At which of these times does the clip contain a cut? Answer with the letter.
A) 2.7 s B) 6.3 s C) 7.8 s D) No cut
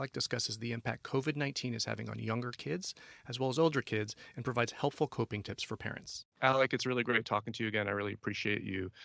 B